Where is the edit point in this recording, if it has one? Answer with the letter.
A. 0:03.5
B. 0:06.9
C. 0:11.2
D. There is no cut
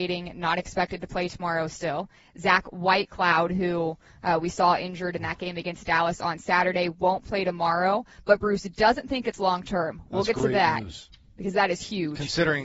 D